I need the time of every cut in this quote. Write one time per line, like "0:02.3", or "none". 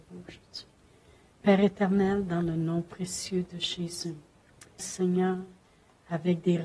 0:04.8